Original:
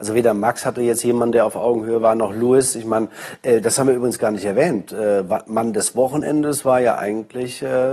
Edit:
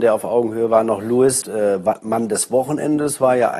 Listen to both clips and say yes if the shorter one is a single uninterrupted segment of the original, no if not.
no